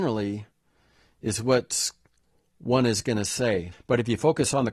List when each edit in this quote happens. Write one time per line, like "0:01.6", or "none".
0:03.7